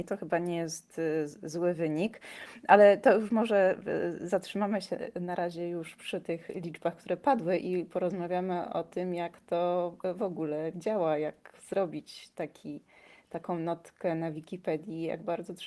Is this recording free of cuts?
yes; 0 cuts

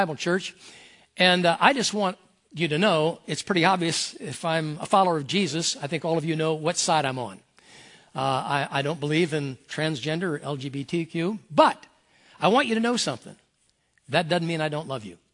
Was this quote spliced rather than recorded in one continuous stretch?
no; 0 cuts

